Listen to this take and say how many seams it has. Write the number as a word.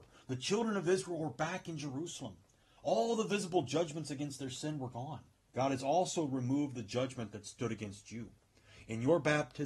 two